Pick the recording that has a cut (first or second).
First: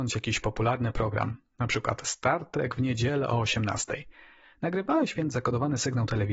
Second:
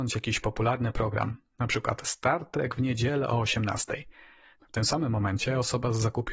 second